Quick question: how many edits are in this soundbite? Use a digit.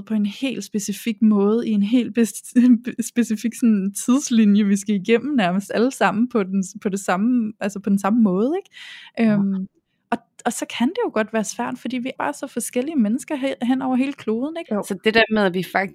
2